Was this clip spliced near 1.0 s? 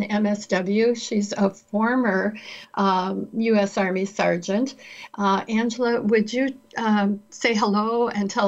no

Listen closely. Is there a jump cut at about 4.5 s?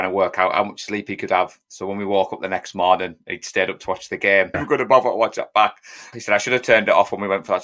yes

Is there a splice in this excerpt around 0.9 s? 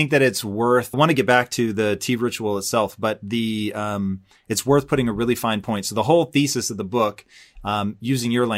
yes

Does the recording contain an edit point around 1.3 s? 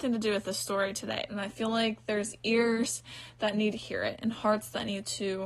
yes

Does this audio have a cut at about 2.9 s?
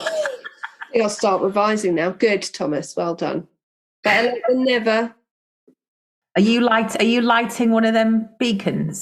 no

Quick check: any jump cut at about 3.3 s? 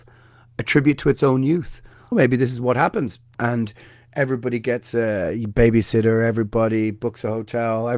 yes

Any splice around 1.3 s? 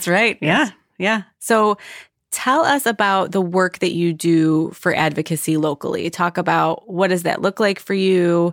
no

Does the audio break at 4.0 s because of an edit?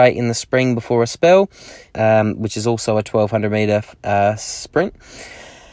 no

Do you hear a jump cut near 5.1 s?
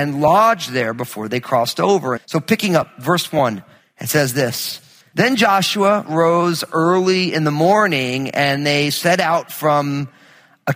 no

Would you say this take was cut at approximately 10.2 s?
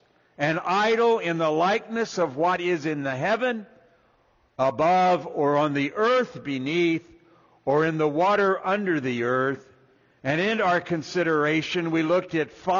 yes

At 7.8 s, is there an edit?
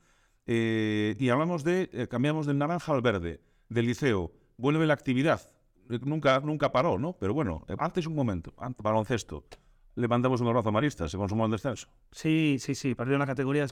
yes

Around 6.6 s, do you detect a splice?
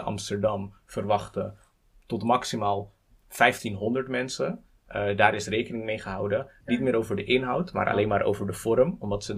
yes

